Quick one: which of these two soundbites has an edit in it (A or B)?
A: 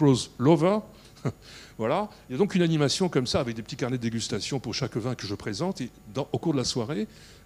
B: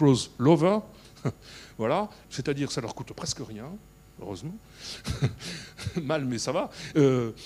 B